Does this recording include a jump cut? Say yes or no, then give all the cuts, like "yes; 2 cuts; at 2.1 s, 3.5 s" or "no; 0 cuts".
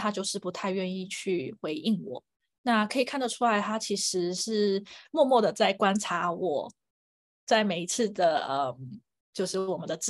no; 0 cuts